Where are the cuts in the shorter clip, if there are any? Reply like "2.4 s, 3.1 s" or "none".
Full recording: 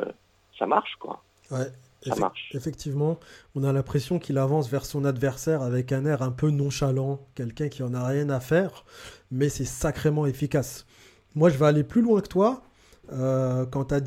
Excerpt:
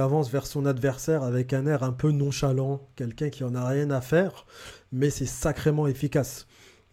none